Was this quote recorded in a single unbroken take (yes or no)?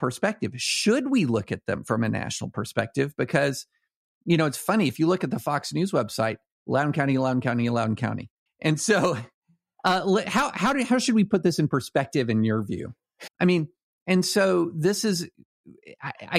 no